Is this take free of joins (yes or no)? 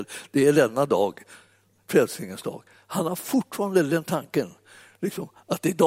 yes